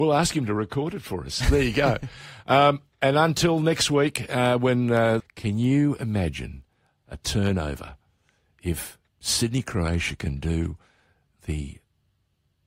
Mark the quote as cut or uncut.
cut